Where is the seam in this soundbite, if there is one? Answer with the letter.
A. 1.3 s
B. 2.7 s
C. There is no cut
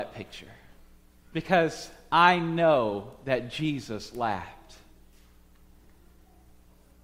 C